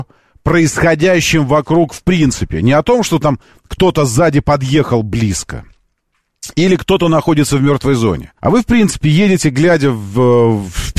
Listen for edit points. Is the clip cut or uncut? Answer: cut